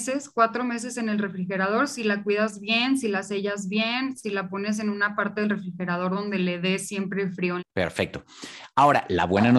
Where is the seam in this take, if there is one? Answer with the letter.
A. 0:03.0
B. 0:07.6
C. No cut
B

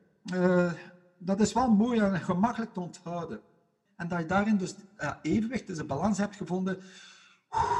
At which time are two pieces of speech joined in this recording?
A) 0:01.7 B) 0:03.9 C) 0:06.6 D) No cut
B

